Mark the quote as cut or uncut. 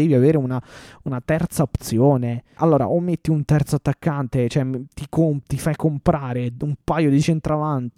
cut